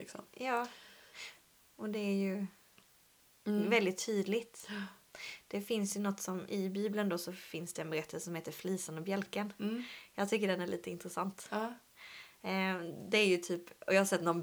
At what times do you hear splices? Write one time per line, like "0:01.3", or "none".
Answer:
none